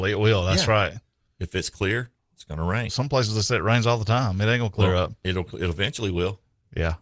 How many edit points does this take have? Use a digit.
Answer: 1